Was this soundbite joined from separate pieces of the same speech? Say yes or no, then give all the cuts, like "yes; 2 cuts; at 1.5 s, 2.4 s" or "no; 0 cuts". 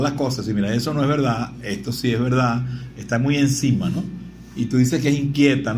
no; 0 cuts